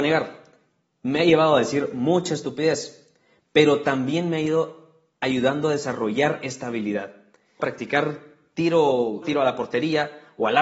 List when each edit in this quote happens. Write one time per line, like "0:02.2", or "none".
0:07.6
0:09.2